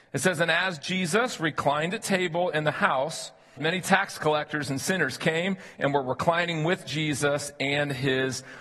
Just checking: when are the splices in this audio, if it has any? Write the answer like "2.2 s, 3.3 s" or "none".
3.6 s